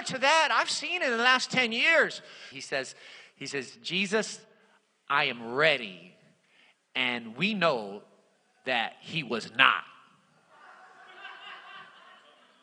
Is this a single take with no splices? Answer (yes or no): no